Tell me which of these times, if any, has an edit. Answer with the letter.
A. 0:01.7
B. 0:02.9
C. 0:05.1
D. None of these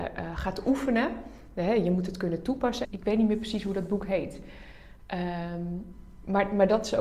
B